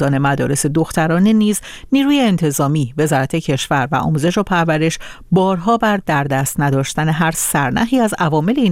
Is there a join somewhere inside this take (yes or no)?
no